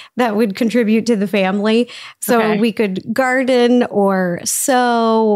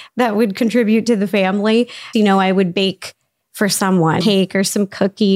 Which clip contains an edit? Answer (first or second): second